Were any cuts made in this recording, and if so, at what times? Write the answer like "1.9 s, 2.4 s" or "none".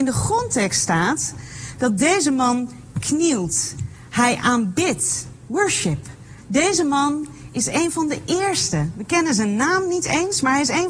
6.4 s